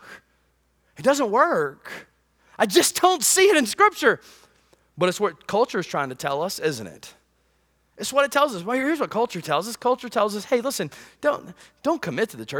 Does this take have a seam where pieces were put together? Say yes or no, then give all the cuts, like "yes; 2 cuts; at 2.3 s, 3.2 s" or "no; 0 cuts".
no; 0 cuts